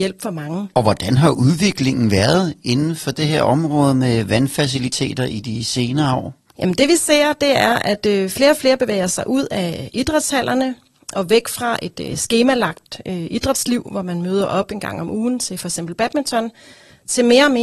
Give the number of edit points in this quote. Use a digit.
0